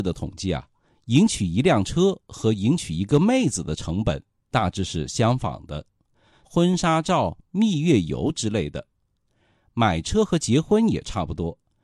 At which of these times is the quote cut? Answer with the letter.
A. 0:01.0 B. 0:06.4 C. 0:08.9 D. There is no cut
B